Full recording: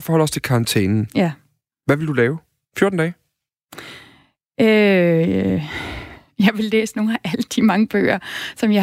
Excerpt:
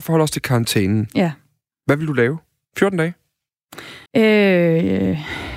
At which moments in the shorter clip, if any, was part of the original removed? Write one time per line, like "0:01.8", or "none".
0:04.1